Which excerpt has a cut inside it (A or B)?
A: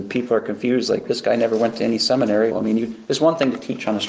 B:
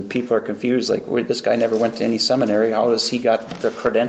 A